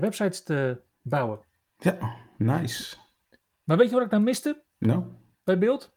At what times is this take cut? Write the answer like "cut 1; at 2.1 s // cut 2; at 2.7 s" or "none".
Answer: cut 1; at 4.7 s